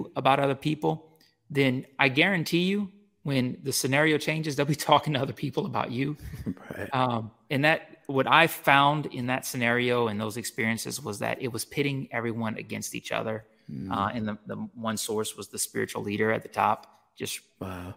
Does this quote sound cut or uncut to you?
uncut